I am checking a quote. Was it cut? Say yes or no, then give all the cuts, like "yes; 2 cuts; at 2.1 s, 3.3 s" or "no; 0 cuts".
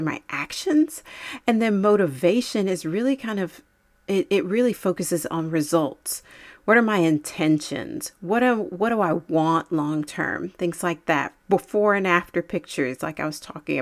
no; 0 cuts